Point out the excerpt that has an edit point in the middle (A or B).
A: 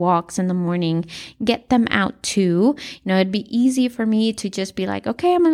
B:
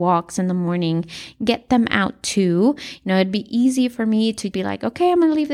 B